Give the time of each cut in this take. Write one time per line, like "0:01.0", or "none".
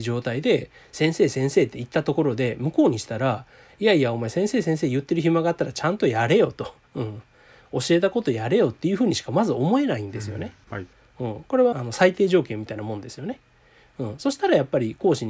0:10.7
0:11.7